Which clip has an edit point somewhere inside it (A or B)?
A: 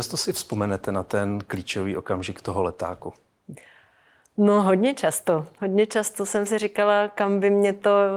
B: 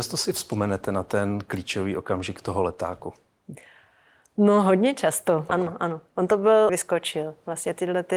B